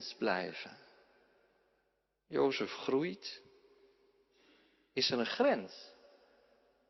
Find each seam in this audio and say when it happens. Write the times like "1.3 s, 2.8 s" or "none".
none